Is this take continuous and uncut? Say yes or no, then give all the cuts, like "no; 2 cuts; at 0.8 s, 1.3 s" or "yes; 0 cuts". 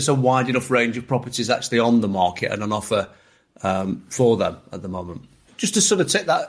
no; 1 cut; at 5.5 s